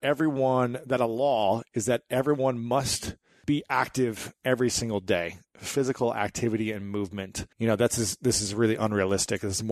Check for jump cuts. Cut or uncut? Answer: cut